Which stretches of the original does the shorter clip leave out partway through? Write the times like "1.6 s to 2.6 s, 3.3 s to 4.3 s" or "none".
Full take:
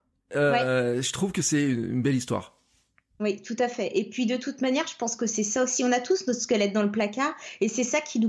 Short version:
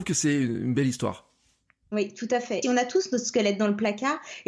3.9 s to 5.8 s